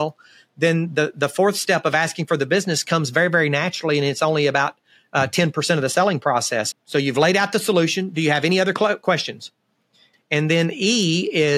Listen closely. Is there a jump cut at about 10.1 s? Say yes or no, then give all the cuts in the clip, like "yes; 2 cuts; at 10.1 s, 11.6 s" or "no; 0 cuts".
yes; 3 cuts; at 1.1 s, 6.7 s, 10.1 s